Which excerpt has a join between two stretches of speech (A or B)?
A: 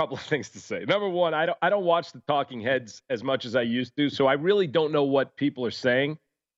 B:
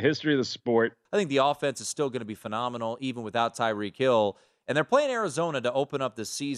B